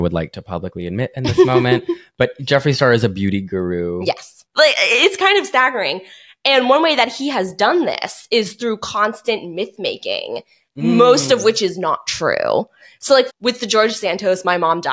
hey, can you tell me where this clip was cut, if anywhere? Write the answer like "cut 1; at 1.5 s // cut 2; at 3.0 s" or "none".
cut 1; at 4.5 s // cut 2; at 13.3 s